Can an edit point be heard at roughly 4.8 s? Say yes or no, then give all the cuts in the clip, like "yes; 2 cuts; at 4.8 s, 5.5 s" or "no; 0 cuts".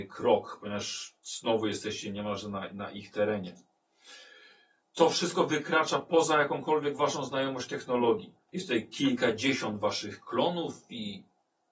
yes; 2 cuts; at 4.8 s, 8.5 s